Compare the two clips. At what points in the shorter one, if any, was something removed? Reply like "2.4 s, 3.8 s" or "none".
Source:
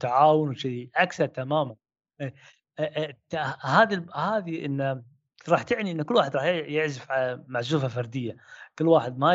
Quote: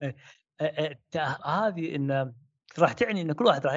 1.4 s